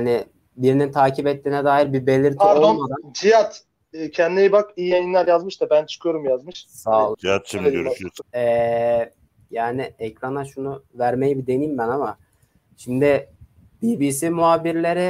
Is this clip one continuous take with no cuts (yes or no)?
no